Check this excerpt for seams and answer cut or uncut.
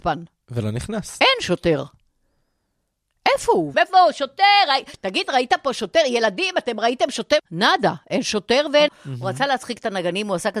cut